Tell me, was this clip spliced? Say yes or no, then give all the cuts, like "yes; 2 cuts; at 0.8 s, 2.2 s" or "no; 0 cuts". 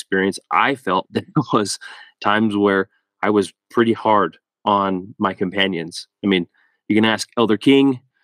yes; 1 cut; at 1.1 s